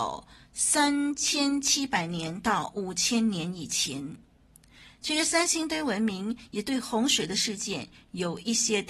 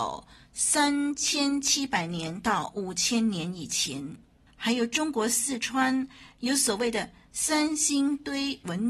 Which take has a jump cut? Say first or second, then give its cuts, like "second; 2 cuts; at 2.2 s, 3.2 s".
second; 1 cut; at 4.5 s